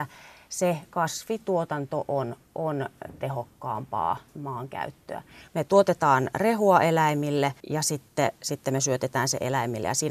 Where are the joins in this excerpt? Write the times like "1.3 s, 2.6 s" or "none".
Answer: 5.5 s, 7.6 s